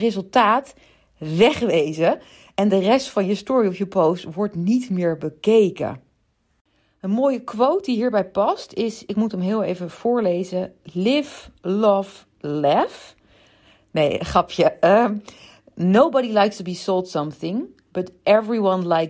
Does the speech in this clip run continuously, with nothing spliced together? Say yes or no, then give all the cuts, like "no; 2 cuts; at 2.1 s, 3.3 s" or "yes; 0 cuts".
yes; 0 cuts